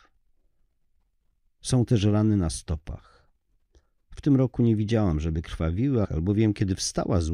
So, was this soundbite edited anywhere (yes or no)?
yes